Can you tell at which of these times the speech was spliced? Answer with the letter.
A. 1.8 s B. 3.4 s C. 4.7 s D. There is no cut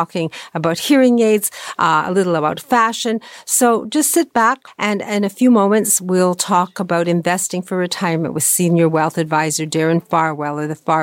C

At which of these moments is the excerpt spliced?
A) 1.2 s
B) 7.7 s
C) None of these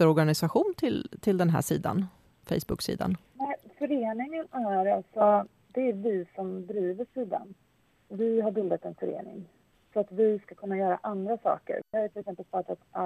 C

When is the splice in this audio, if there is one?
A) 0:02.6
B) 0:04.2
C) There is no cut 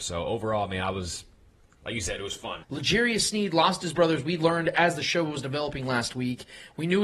A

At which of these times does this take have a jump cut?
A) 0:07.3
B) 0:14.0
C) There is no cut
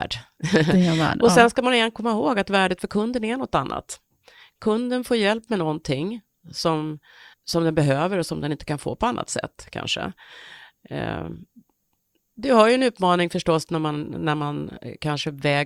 A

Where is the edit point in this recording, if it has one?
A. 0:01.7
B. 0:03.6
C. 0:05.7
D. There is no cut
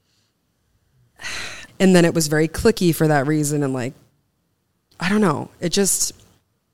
A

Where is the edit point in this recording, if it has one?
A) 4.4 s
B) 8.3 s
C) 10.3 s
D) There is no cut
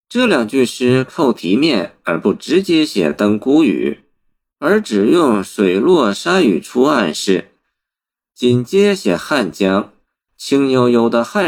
C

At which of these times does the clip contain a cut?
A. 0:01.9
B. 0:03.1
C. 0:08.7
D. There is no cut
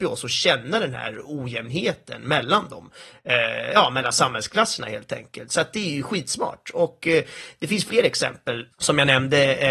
C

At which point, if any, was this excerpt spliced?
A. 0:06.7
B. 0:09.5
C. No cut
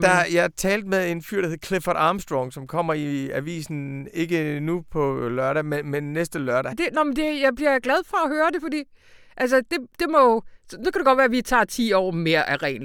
A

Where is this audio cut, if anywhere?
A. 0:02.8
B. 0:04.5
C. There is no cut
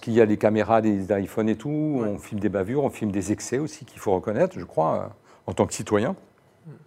C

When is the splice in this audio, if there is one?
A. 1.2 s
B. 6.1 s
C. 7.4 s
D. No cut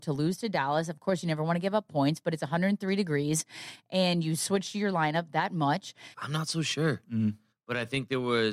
B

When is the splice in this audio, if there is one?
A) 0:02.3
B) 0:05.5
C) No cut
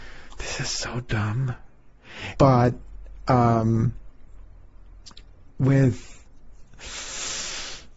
A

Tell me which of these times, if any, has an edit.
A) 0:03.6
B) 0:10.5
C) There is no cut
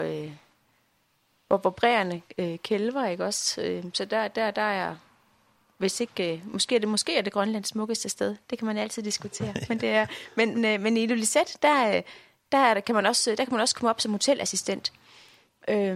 B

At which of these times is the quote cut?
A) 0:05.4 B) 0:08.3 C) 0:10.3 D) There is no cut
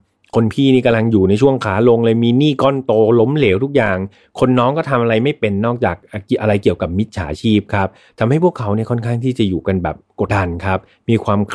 C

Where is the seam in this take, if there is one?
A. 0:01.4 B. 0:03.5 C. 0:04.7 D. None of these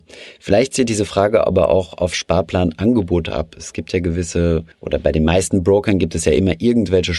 C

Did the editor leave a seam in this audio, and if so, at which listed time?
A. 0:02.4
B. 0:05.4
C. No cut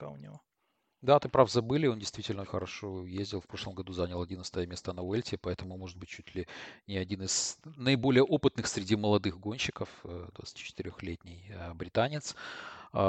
A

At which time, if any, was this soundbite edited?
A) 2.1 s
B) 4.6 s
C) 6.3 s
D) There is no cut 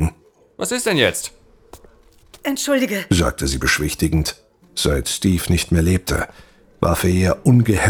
B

